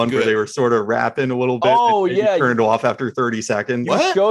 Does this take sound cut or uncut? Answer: uncut